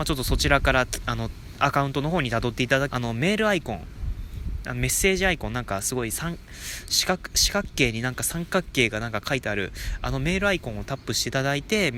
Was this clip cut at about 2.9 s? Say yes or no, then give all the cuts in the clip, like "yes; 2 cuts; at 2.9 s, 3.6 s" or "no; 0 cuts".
yes; 1 cut; at 2.9 s